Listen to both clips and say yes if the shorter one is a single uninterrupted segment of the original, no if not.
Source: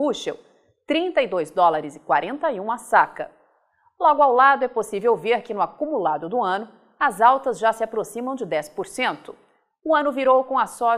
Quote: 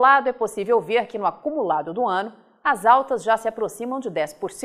yes